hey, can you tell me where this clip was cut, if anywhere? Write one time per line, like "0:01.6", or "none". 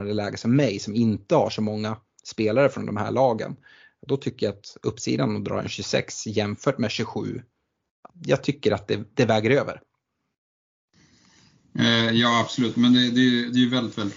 0:08.1